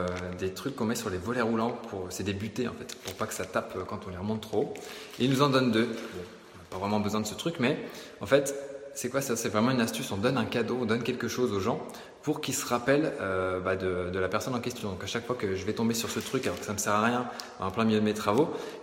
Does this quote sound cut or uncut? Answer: uncut